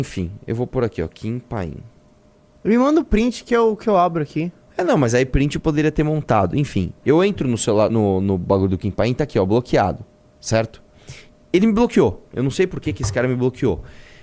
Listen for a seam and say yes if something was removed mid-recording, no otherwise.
no